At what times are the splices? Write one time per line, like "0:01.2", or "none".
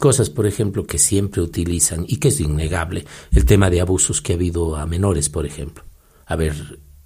none